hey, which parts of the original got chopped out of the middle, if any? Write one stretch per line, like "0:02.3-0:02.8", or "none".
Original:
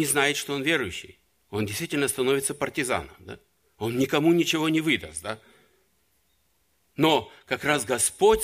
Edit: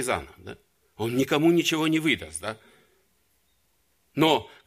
none

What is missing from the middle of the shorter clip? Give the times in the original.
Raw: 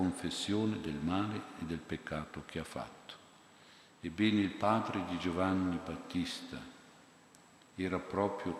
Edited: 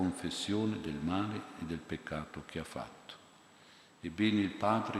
none

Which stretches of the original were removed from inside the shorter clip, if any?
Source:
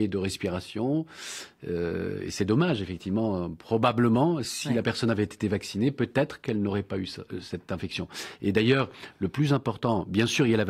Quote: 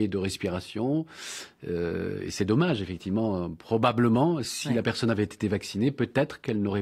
none

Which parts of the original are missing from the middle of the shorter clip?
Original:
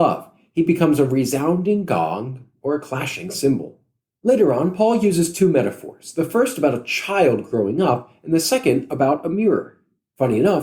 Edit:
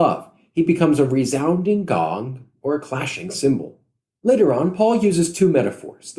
none

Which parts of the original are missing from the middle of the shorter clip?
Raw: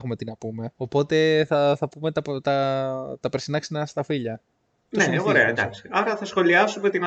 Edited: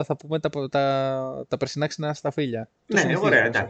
0:04.5-0:04.8

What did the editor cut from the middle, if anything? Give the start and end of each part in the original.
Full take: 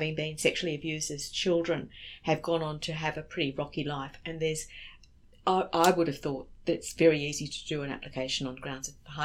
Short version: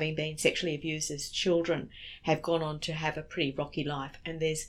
none

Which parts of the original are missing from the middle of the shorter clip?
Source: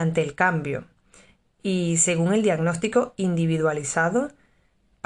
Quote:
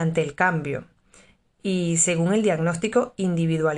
none

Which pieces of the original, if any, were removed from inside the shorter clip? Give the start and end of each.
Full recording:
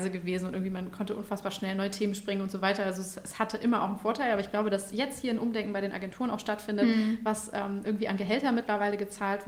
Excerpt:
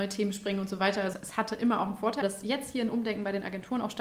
0:02.9-0:03.1
0:04.2-0:04.7

